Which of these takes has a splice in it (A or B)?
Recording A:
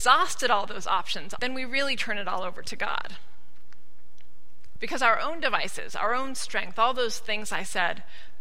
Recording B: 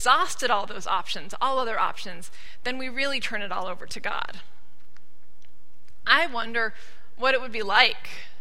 A